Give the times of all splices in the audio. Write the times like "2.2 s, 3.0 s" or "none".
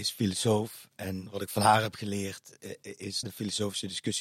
3.2 s